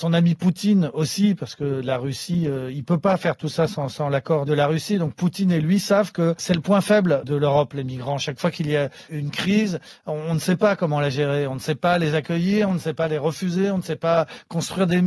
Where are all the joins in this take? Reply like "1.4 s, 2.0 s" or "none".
none

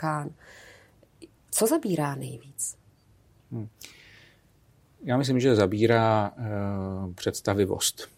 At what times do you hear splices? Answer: none

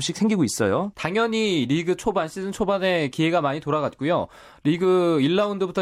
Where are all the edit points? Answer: 0.9 s

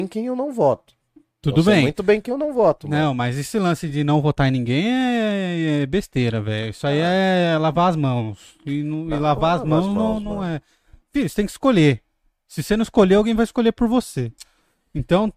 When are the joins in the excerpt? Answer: none

